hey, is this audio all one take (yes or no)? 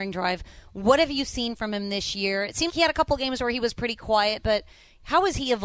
no